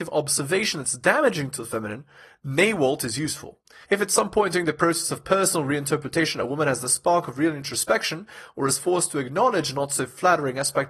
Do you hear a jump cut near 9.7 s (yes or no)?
no